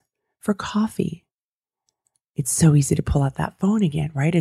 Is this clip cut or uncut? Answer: uncut